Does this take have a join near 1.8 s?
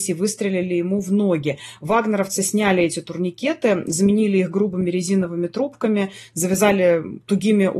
no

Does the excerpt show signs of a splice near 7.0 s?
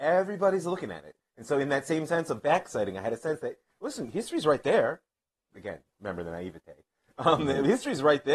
no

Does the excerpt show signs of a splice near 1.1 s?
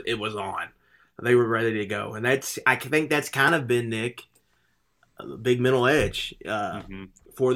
no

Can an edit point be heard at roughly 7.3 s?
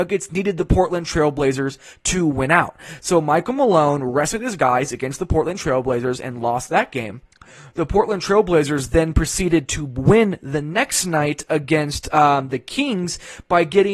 no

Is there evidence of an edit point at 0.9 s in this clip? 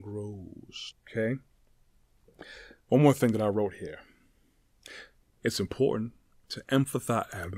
yes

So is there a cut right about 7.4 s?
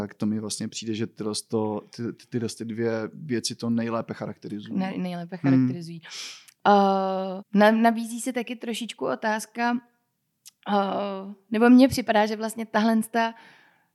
yes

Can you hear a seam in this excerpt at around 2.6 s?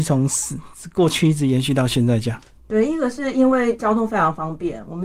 yes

